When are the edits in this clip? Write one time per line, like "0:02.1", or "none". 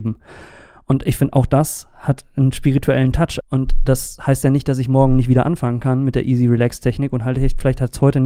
0:03.4